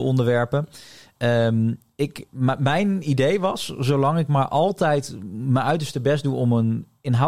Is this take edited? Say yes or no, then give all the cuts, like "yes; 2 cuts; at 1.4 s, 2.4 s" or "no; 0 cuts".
no; 0 cuts